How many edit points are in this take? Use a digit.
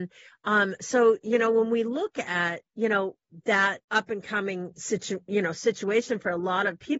2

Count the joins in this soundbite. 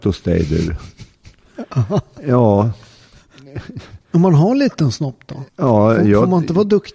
1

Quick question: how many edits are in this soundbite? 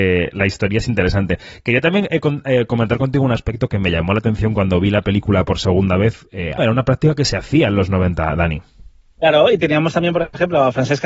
1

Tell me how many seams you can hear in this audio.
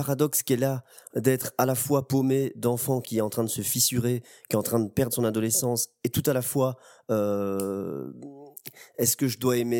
0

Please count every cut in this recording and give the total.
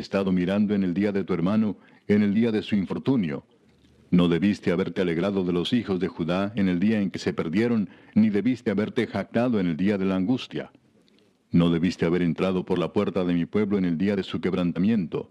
0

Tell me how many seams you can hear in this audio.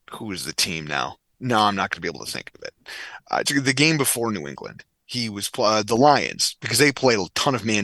1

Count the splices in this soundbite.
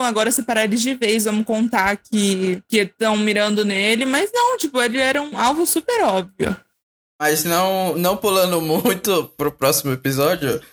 0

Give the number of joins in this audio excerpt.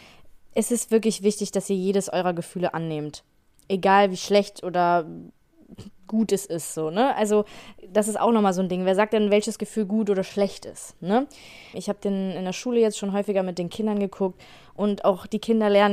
1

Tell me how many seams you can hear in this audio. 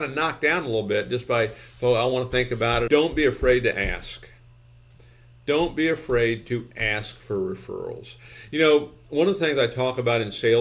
1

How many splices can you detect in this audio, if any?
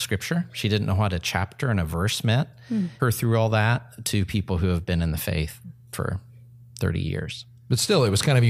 1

